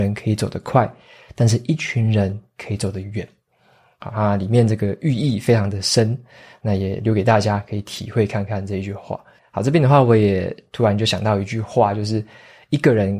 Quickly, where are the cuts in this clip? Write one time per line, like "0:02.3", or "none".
0:09.4

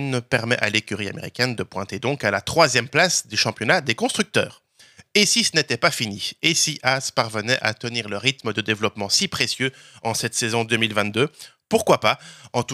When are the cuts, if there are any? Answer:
none

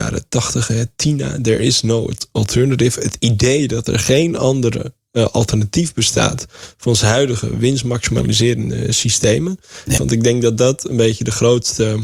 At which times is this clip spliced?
0:10.0

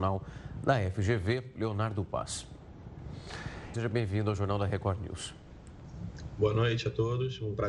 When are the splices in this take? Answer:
0:03.7

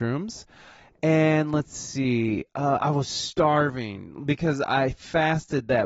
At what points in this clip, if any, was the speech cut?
none

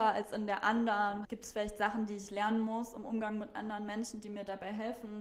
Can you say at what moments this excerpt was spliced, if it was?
0:01.2

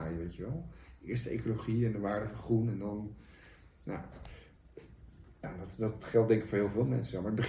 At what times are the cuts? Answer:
none

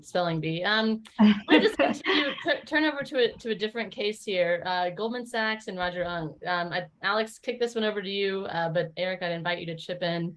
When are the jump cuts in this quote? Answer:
none

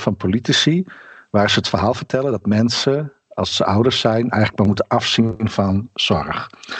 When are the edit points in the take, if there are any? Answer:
none

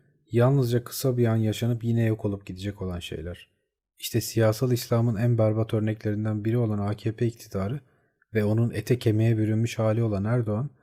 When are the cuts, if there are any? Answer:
none

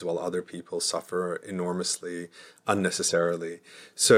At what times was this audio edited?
none

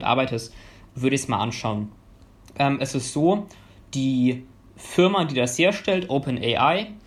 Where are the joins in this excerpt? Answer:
none

